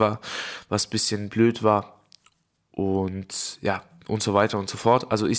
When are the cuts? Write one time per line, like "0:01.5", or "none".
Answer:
none